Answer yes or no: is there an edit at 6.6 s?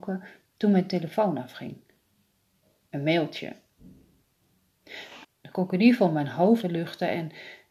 yes